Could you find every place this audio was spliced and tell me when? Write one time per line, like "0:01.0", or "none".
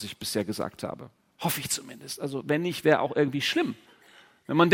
none